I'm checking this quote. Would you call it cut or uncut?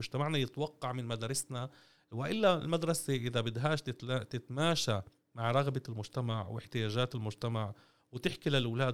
uncut